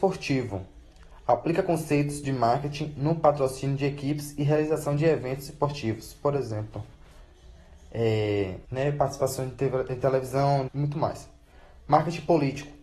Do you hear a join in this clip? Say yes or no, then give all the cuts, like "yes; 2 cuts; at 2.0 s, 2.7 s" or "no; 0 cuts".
yes; 2 cuts; at 8.6 s, 10.7 s